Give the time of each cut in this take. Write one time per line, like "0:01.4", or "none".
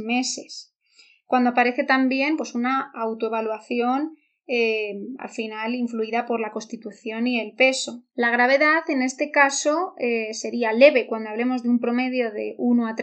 0:08.1